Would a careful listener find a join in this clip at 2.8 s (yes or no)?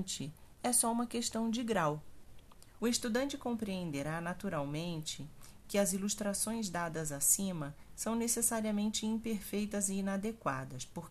yes